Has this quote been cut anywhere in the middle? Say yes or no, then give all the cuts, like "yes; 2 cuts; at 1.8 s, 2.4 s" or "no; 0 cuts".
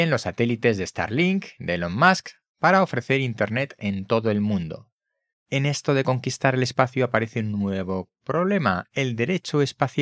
yes; 1 cut; at 5.3 s